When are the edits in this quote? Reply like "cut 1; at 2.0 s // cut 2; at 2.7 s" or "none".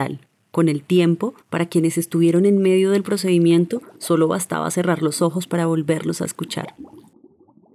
cut 1; at 1.4 s